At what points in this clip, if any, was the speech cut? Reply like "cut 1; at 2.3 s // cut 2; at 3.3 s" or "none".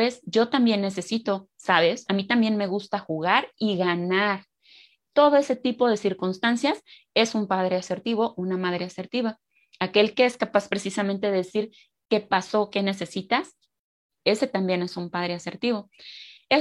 cut 1; at 2.1 s